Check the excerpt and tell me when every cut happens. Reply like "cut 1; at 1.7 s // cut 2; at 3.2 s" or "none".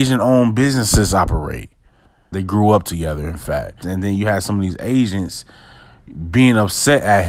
cut 1; at 2.3 s // cut 2; at 3.8 s